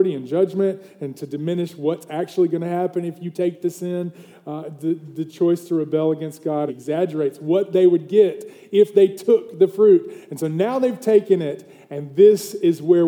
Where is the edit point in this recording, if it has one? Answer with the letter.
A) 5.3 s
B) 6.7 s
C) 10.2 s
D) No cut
B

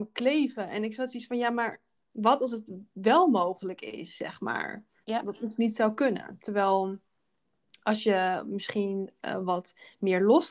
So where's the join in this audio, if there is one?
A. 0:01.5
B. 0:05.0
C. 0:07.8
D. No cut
B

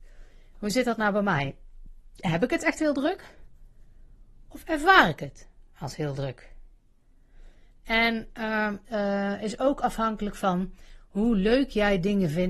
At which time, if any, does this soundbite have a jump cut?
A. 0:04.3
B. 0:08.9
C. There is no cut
B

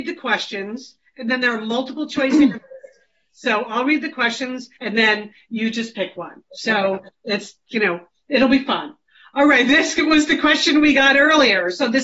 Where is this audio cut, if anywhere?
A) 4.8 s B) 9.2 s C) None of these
A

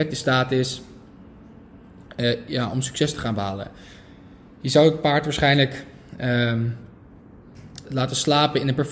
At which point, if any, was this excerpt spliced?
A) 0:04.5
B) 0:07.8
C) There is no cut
B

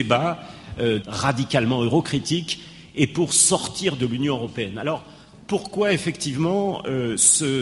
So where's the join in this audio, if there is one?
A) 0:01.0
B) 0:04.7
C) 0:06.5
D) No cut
A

